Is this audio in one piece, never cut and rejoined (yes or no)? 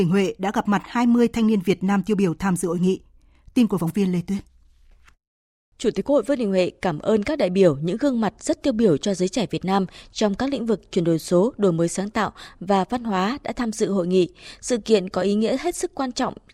yes